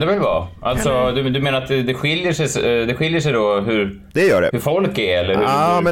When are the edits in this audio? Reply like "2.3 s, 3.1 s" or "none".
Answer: none